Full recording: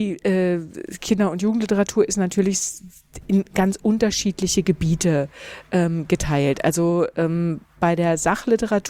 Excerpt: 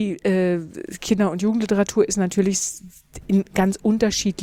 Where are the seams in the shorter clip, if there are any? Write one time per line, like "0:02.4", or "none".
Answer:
none